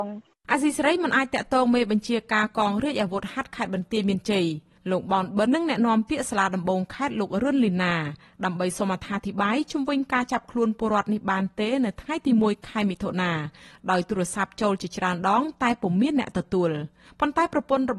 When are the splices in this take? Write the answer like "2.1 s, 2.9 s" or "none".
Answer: 5.5 s